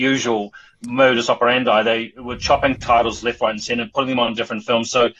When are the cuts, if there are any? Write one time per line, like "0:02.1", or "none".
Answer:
none

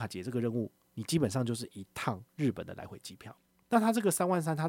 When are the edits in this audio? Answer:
0:03.6

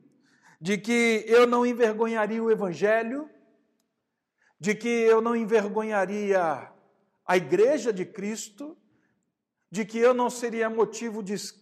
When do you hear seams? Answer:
none

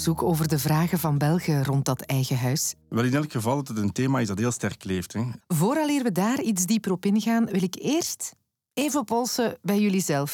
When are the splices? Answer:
0:05.4

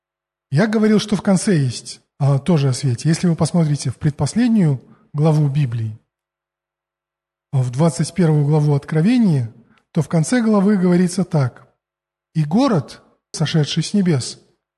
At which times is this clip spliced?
0:13.3

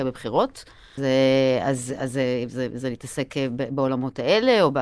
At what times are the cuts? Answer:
0:01.0

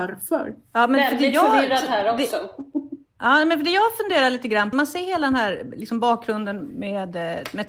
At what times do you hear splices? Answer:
0:04.7

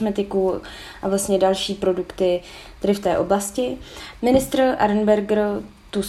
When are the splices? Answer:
0:04.2

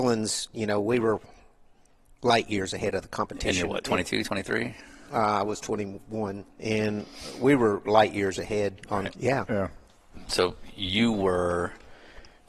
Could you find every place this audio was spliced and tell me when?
0:06.5
0:09.1

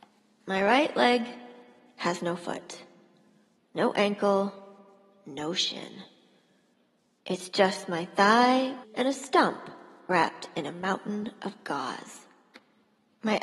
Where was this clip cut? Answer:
0:08.8

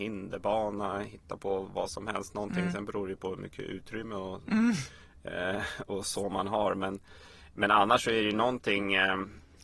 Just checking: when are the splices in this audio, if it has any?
0:01.6

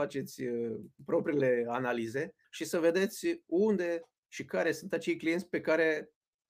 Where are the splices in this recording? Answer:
0:02.4

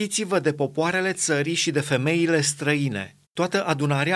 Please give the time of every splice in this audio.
0:03.2

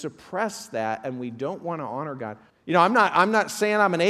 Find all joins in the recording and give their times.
0:02.5

